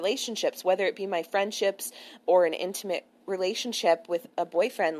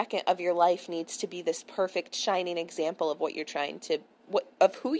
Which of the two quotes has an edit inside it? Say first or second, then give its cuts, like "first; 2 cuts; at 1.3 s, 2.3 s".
first; 1 cut; at 2.2 s